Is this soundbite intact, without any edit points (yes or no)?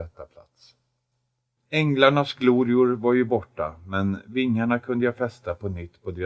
no